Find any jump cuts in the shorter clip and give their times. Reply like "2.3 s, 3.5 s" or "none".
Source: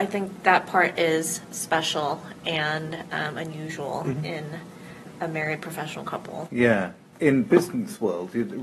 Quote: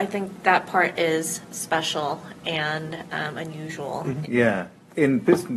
4.2 s